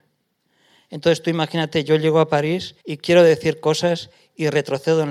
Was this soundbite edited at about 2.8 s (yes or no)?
yes